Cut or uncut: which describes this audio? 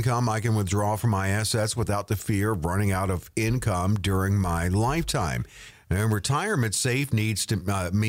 cut